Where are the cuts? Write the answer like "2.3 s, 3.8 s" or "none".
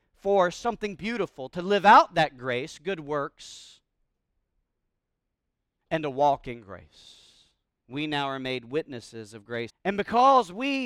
7.8 s, 9.7 s